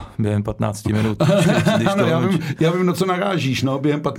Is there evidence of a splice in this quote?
no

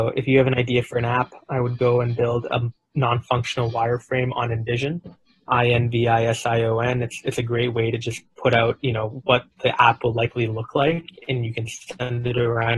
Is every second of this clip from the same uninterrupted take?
yes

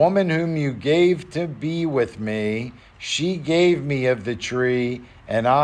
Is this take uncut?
yes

